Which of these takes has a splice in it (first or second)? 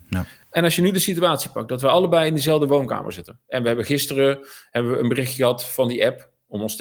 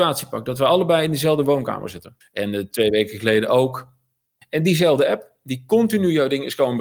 second